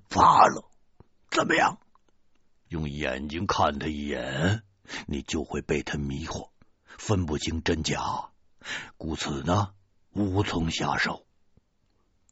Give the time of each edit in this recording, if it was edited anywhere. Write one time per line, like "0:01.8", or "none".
0:02.7

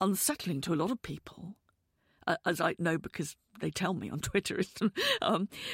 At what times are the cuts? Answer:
none

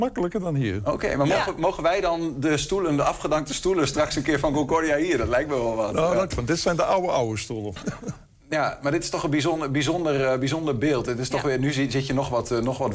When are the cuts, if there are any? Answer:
0:06.3
0:07.8

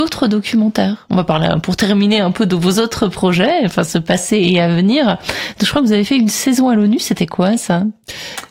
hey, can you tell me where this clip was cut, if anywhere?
none

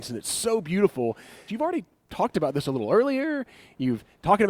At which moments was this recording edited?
0:01.5

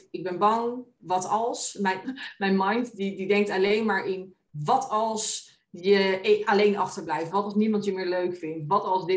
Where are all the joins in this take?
0:02.0
0:07.3

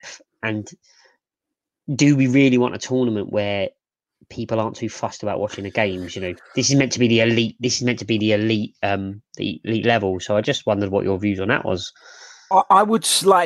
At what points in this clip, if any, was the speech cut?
none

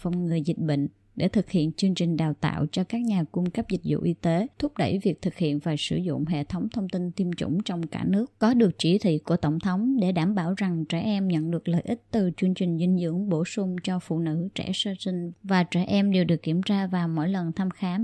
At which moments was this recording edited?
none

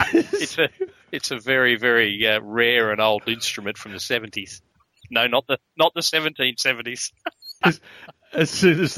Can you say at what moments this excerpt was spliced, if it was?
none

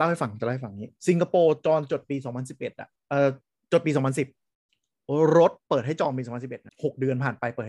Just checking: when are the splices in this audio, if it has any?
0:01.0
0:05.6

